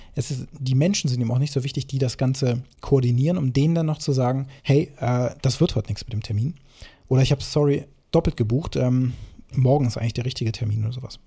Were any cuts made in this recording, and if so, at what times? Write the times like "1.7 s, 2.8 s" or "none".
4.6 s